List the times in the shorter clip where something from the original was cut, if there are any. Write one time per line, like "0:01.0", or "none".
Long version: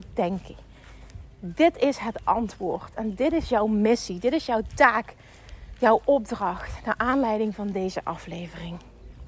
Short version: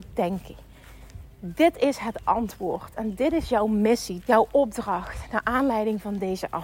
0:04.2